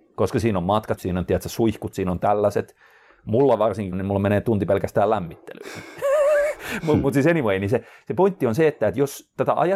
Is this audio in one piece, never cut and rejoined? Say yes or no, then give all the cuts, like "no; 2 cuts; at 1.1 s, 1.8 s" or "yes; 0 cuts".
no; 2 cuts; at 1.0 s, 3.9 s